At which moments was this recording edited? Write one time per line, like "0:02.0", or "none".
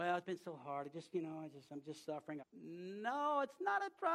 0:02.4